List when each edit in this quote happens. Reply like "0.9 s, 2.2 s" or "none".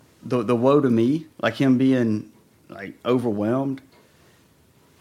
1.3 s